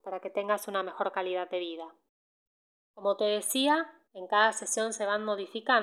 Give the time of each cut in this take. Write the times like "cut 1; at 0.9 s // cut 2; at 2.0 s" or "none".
cut 1; at 2.8 s // cut 2; at 4.1 s